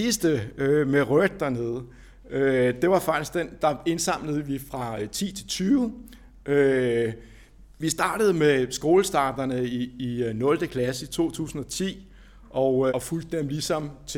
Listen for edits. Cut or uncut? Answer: cut